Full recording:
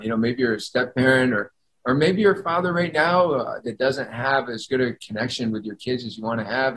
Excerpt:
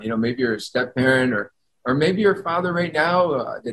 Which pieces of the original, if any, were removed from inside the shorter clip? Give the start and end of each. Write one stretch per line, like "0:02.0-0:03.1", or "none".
none

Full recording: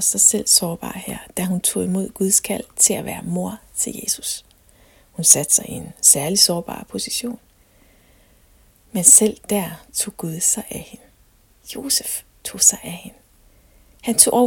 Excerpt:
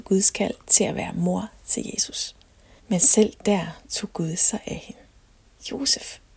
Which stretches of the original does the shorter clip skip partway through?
0:04.9-0:08.8

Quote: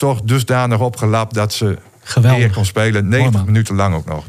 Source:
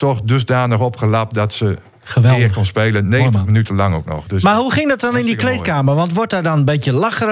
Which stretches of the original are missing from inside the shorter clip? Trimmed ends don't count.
none

